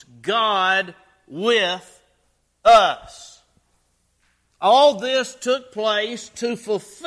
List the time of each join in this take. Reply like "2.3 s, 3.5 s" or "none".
4.5 s

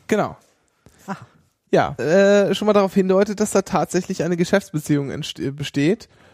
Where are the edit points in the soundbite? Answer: 2.0 s

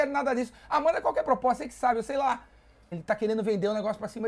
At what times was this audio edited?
2.9 s

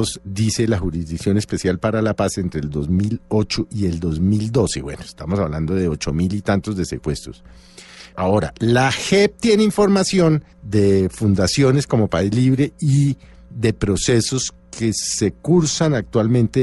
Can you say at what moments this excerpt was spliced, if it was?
8.1 s, 10.5 s

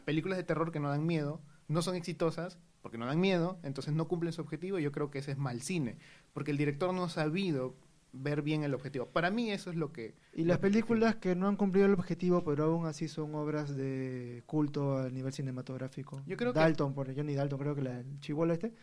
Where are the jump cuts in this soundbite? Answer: none

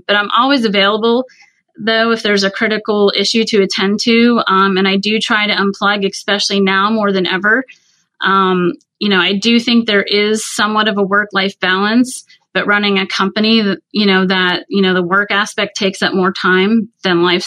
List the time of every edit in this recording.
none

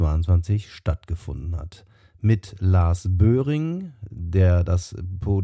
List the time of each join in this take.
none

